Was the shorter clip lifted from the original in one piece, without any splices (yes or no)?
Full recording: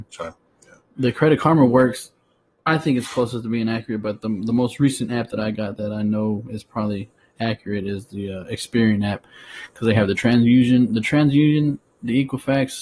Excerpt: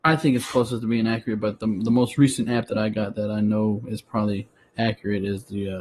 yes